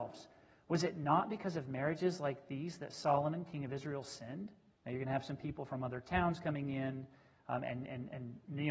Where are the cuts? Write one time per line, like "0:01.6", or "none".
0:04.7